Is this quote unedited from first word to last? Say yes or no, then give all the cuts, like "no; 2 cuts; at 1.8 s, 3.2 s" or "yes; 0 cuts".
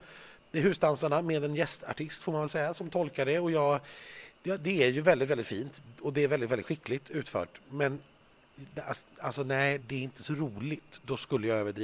no; 1 cut; at 9.8 s